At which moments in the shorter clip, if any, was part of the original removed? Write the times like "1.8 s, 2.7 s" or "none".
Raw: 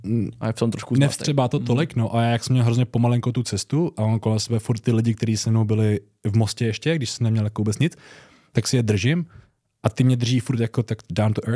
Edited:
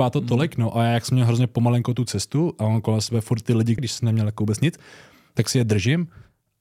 3.8 s